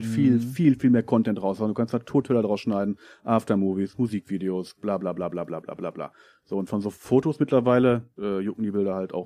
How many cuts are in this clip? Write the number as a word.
one